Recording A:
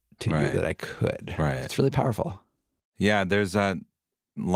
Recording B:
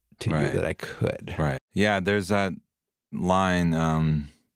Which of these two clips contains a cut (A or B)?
B